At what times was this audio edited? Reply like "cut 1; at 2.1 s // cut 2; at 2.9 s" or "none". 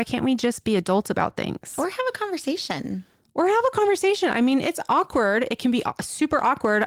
none

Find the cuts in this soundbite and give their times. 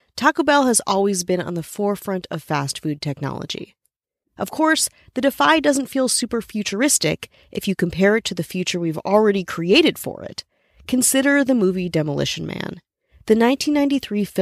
cut 1; at 4.2 s

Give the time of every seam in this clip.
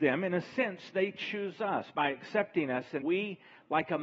cut 1; at 3.0 s

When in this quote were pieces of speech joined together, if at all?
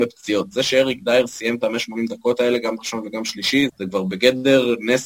cut 1; at 3.7 s

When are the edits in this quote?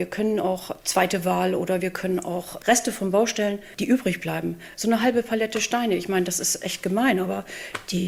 none

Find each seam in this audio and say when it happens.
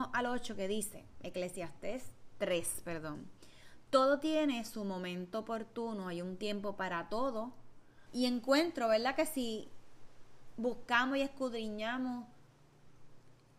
cut 1; at 8.1 s

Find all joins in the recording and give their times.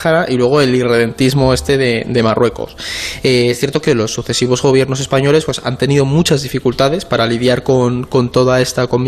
none

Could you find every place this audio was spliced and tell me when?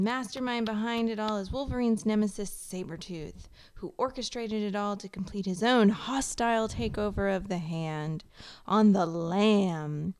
none

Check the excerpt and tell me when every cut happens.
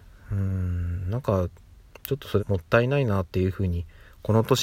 cut 1; at 2.4 s

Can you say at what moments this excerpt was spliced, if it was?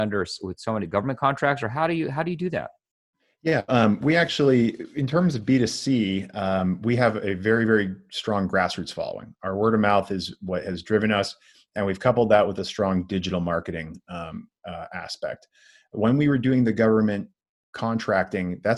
cut 1; at 3.7 s

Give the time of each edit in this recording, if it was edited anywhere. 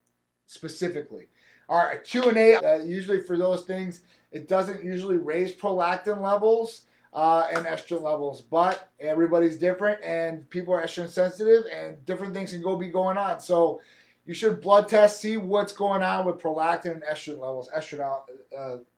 cut 1; at 2.6 s

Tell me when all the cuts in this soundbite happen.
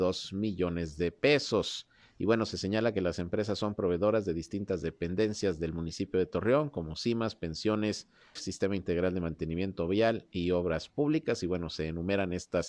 cut 1; at 8.4 s

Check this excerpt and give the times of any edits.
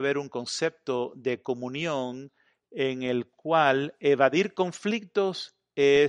none

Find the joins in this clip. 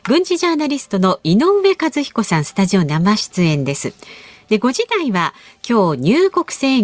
none

